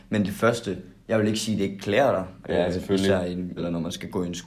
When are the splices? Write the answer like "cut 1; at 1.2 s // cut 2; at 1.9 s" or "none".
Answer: cut 1; at 2.4 s // cut 2; at 3.6 s